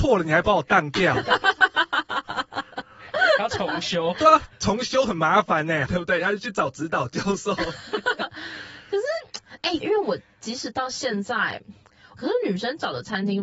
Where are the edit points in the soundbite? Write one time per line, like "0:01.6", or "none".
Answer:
0:05.9
0:09.8
0:12.2